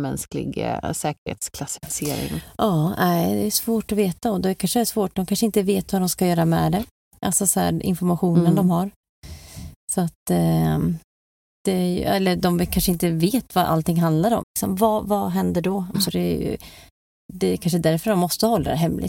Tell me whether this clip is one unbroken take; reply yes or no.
no